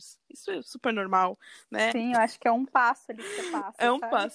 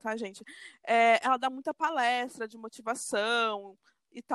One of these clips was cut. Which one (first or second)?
first